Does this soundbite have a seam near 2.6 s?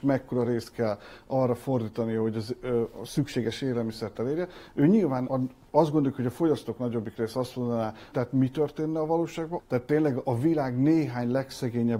no; 3 cuts; at 5.3 s, 8.1 s, 9.6 s

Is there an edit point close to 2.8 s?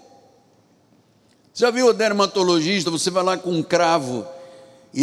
no; 0 cuts

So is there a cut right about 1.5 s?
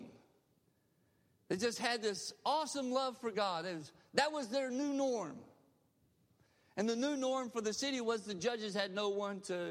no; 0 cuts

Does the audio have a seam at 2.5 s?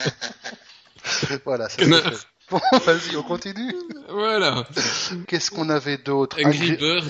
yes; 2 cuts; at 2.5 s, 5.2 s

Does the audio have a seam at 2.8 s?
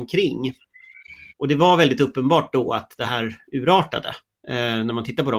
no; 1 cut; at 1.3 s

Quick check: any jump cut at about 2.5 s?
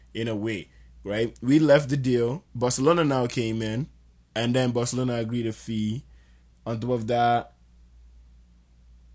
yes; 1 cut; at 2.5 s

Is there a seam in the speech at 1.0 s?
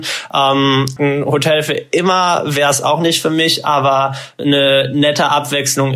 yes; 1 cut; at 1.0 s

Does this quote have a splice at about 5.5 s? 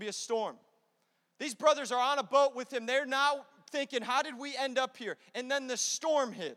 no; 0 cuts

